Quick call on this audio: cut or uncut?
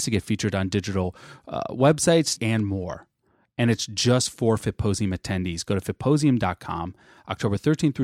cut